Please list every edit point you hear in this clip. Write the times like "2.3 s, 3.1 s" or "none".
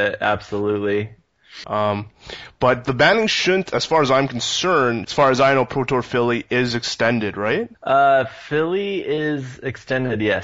1.6 s, 5.0 s, 7.7 s